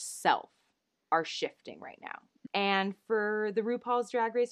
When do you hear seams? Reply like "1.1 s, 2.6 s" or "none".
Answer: 2.5 s